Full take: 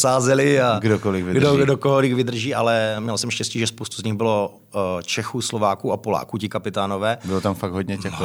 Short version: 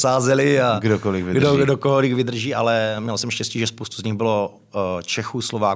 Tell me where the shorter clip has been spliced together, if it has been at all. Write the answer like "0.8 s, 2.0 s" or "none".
none